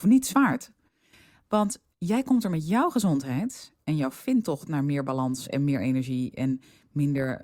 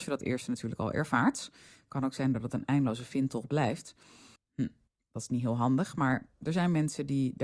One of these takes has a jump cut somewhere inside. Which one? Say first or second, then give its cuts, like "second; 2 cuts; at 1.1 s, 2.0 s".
second; 1 cut; at 4.4 s